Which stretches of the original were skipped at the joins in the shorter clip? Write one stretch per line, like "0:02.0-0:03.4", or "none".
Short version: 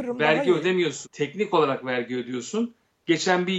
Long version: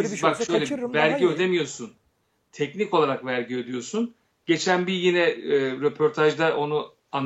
0:01.8-0:02.4